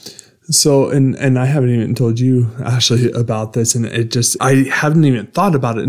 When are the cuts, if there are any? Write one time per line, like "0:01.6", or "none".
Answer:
0:04.4